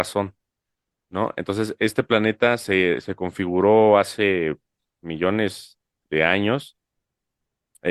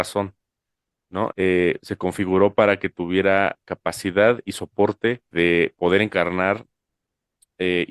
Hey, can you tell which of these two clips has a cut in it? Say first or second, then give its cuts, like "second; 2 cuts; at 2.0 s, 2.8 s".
second; 2 cuts; at 1.3 s, 5.3 s